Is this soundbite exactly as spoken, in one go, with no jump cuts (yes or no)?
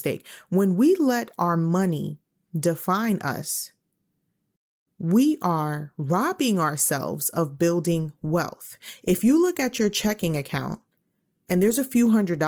yes